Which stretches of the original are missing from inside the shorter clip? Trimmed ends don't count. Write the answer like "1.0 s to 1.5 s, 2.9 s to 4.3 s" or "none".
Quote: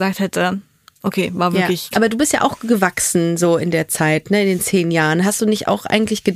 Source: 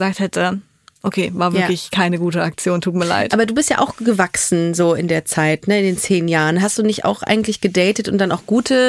1.9 s to 3.3 s

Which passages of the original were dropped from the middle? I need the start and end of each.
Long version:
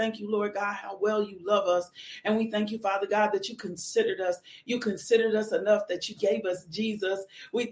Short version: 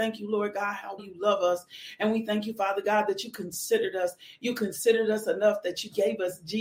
1.0 s to 1.2 s

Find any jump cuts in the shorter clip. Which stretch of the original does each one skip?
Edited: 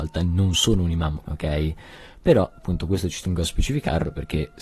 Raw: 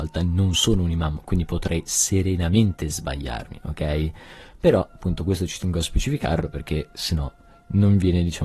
1.2 s to 3.6 s

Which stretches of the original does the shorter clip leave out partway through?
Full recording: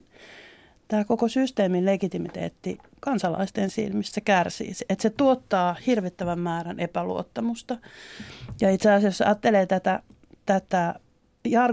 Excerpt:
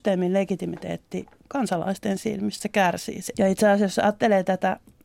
4.9 s to 8.6 s

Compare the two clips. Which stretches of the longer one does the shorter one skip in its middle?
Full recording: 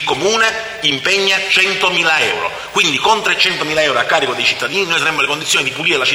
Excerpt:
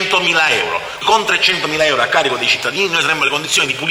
2.7 s to 3.0 s

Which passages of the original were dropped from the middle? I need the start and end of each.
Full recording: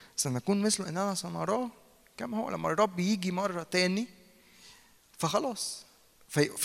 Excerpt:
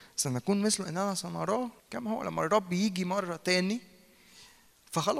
1.8 s to 2.1 s

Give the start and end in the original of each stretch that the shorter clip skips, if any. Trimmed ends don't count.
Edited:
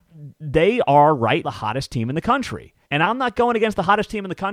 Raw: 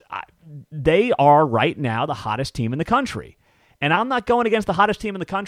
1.7 s to 2.1 s, 3.5 s to 3.7 s

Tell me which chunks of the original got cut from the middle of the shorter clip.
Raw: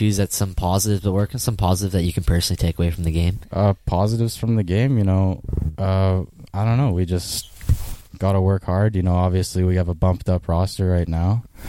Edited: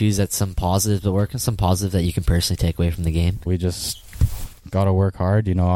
3.5 s to 6.9 s

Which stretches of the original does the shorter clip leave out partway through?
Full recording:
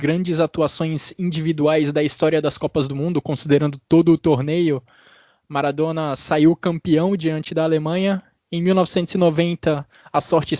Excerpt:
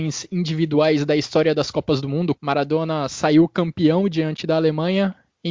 3.2 s to 5.4 s

